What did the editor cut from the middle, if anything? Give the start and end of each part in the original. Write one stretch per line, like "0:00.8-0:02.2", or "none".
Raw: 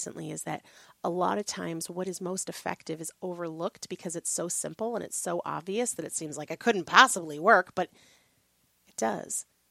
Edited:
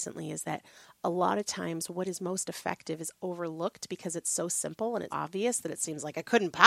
0:05.1-0:05.4